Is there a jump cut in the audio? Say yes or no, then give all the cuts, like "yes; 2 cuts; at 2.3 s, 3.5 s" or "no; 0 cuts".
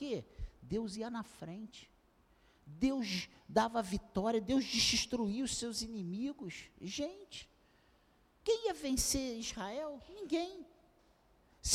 no; 0 cuts